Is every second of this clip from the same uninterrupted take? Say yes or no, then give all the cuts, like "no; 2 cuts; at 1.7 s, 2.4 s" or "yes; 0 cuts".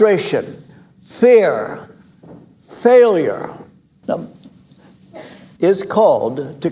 no; 2 cuts; at 4.0 s, 5.6 s